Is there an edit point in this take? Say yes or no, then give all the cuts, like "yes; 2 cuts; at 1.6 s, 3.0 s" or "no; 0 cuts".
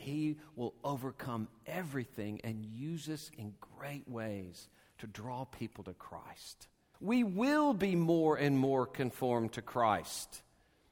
yes; 1 cut; at 6.9 s